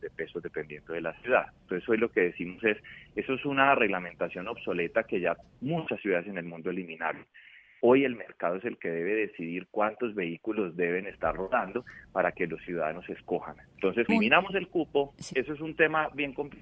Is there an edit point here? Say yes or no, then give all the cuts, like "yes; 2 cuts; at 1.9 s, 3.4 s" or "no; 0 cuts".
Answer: yes; 2 cuts; at 14.1 s, 15.3 s